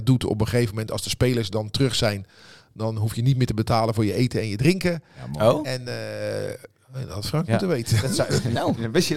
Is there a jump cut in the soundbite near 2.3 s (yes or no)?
no